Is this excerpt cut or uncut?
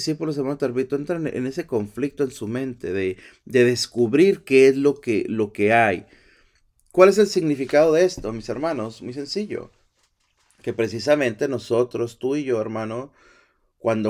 uncut